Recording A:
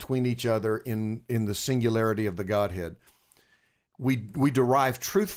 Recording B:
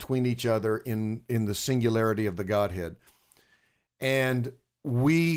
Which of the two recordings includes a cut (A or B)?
A